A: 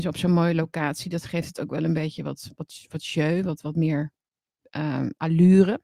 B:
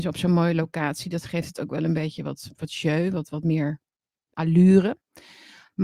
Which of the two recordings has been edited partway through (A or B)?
B